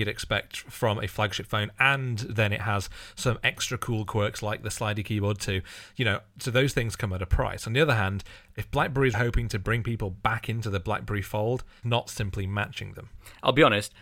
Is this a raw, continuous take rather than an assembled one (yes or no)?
no